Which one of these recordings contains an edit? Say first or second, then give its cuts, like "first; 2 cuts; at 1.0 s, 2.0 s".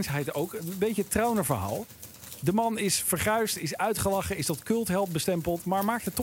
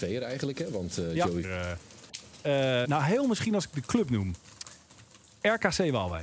second; 2 cuts; at 1.4 s, 2.8 s